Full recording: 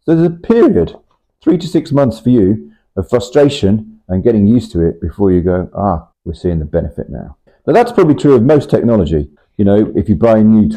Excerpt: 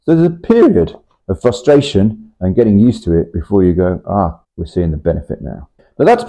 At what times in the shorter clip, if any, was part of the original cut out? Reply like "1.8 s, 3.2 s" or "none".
1.2 s